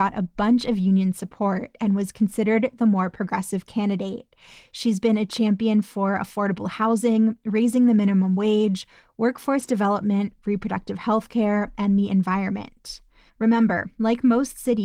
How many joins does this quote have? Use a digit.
1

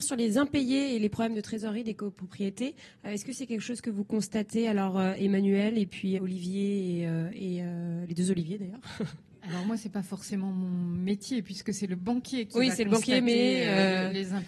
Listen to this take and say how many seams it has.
1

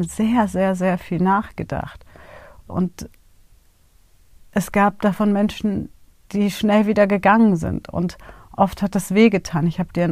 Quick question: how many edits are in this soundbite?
1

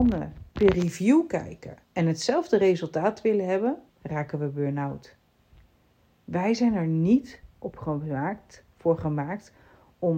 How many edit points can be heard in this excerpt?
2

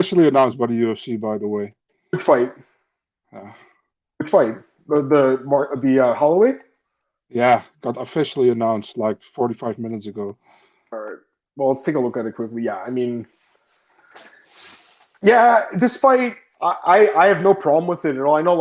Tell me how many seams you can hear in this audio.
0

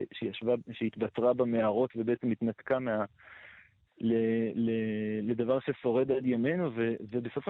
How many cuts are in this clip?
1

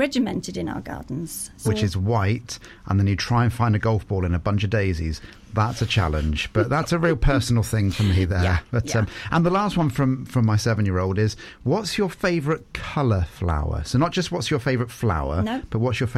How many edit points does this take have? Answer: 1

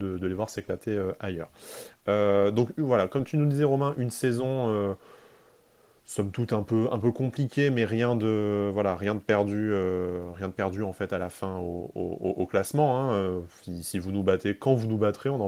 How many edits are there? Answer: 0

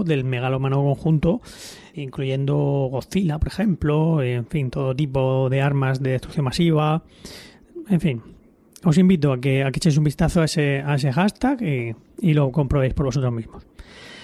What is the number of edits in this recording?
1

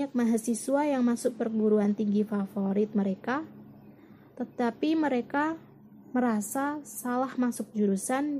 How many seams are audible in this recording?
0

